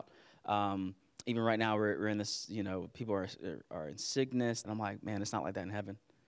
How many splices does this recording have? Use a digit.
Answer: 1